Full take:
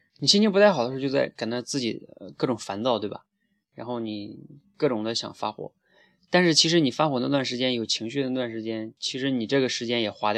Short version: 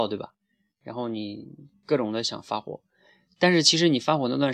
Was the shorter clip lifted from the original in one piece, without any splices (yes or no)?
yes